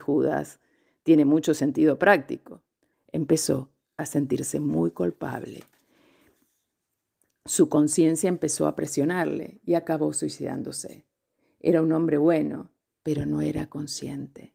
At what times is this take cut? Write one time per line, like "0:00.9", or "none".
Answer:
0:02.9
0:12.8